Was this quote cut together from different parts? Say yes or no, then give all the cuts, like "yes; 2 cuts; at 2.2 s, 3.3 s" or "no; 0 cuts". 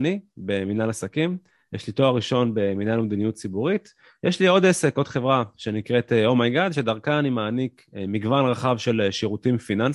no; 0 cuts